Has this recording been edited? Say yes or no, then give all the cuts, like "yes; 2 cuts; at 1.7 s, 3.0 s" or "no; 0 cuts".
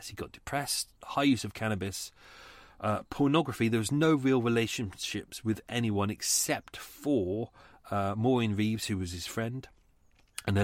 yes; 1 cut; at 1.0 s